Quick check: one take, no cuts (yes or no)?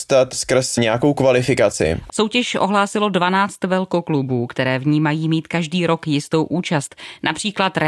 no